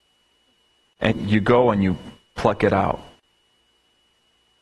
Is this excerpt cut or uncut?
cut